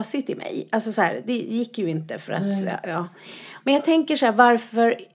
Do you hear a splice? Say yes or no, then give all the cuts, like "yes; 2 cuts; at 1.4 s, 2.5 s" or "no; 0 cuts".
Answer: yes; 1 cut; at 3.6 s